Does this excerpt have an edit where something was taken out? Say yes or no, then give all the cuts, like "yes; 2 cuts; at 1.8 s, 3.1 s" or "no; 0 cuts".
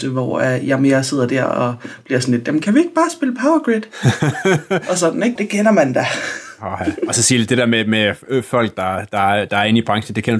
yes; 1 cut; at 5.4 s